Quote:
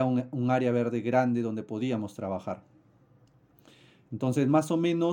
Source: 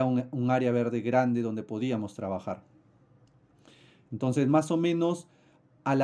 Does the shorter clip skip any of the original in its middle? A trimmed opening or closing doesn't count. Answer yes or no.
no